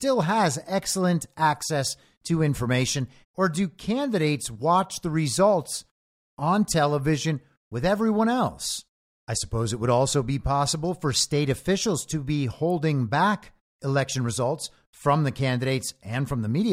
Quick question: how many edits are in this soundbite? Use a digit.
2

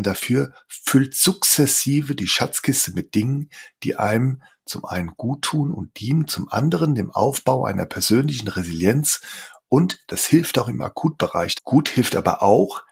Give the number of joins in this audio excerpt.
1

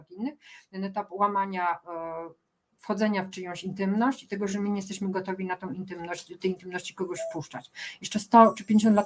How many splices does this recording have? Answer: 0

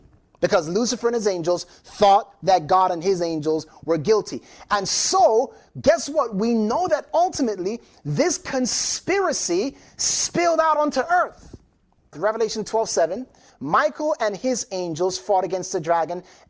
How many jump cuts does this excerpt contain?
2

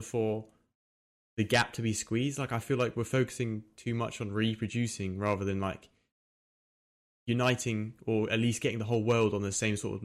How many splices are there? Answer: 0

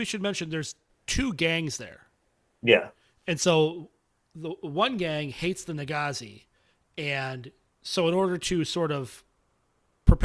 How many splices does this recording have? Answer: 0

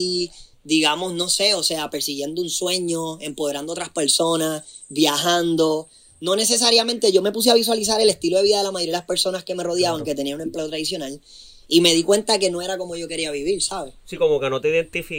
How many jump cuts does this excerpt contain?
0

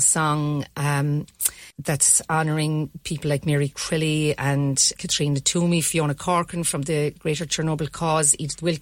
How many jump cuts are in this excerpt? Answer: 2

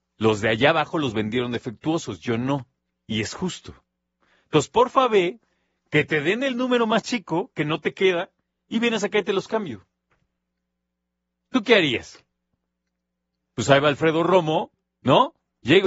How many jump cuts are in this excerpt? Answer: 0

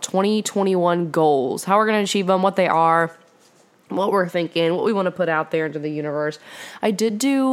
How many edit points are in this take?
0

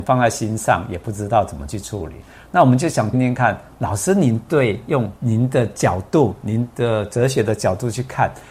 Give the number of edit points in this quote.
2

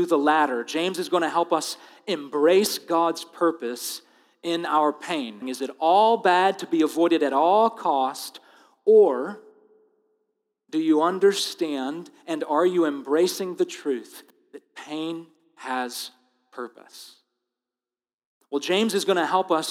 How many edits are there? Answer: 1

